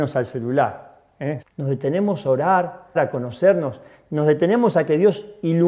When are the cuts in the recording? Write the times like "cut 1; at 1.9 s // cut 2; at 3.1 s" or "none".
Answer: cut 1; at 1.4 s // cut 2; at 3.0 s